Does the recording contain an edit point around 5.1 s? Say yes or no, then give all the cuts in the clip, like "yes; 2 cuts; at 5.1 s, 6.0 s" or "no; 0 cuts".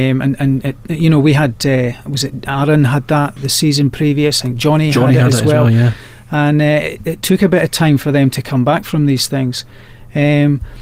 no; 1 cut; at 3.4 s